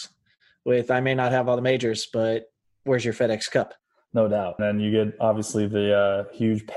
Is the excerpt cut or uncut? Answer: cut